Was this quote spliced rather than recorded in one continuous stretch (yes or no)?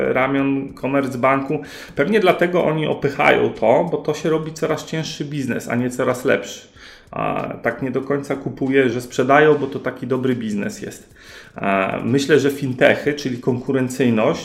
yes